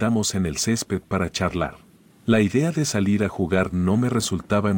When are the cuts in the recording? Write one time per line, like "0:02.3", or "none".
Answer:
0:02.1